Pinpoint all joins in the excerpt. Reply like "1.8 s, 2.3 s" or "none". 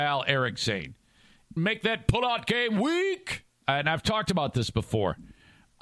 1.6 s, 3.6 s